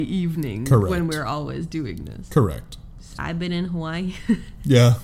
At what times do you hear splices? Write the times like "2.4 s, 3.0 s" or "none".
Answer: 3.1 s